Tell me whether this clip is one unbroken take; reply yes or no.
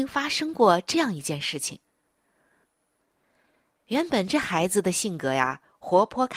no